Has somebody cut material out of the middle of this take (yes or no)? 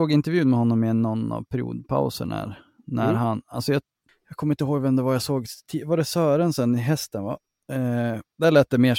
no